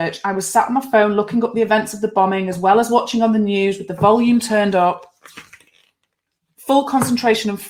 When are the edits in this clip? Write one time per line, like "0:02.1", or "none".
none